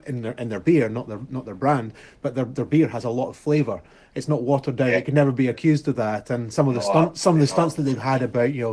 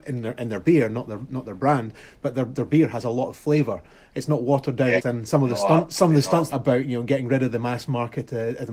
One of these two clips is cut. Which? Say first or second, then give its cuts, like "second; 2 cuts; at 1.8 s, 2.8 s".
second; 2 cuts; at 5.0 s, 6.5 s